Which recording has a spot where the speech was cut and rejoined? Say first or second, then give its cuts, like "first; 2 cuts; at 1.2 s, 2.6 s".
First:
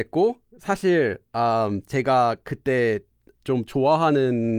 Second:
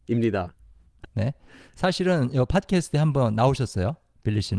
second; 1 cut; at 1.0 s